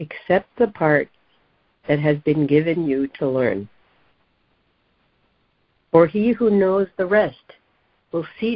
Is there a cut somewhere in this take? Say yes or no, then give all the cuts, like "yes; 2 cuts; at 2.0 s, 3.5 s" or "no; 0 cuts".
no; 0 cuts